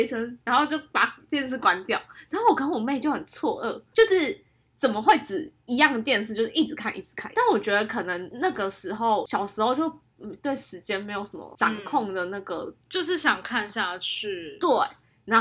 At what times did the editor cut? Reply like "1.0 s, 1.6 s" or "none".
3.9 s, 6.9 s